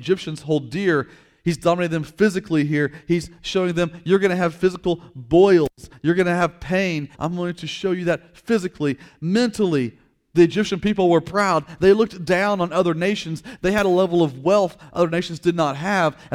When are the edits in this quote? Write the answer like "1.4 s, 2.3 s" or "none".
7.1 s